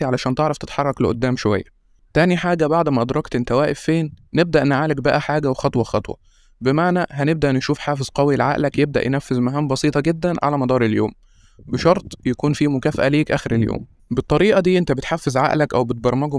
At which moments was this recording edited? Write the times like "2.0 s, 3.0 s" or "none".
5.2 s

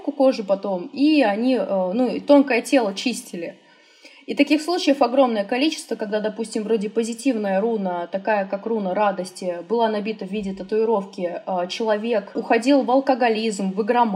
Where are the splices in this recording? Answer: none

